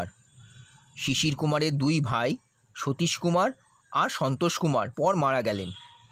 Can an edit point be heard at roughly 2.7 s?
no; 1 cut; at 4.9 s

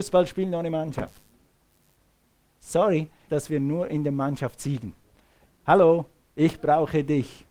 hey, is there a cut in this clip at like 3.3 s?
yes; 2 cuts; at 3.3 s, 5.5 s

